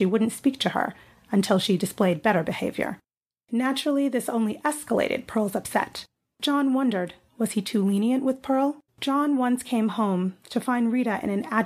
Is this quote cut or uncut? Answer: cut